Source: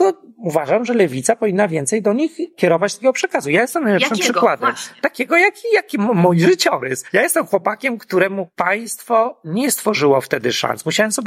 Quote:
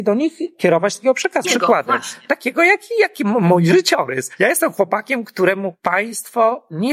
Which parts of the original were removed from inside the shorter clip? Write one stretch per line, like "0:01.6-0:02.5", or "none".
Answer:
0:03.4-0:04.2